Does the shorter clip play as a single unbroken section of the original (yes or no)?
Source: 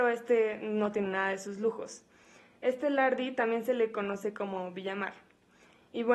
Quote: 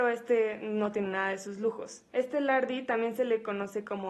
no